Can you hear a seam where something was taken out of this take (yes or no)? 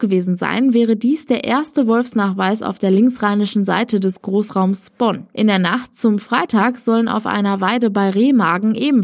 no